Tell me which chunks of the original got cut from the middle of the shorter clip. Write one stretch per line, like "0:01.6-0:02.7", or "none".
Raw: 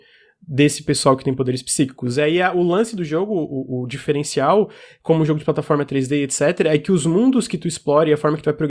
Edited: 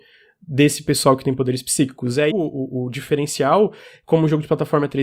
0:02.3-0:03.3